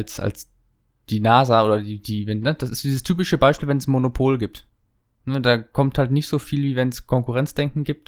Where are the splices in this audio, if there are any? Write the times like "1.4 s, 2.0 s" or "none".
none